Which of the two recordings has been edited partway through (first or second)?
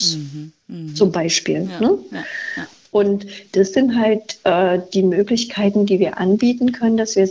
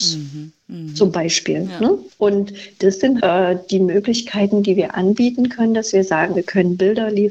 second